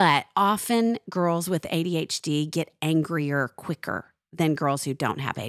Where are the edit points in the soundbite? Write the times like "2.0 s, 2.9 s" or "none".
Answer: none